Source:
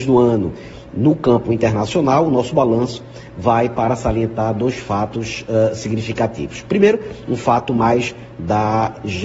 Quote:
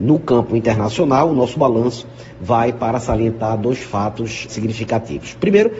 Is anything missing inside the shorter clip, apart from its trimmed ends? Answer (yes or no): yes